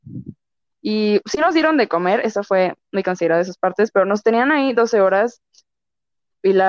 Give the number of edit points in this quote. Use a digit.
0